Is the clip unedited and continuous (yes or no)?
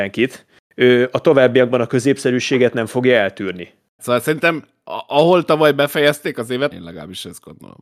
no